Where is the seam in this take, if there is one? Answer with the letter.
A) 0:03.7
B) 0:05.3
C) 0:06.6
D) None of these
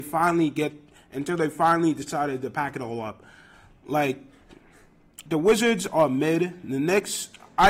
B